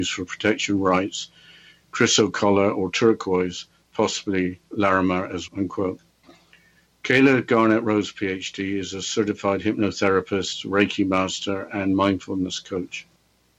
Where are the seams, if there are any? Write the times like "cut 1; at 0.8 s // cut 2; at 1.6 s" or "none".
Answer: cut 1; at 5.5 s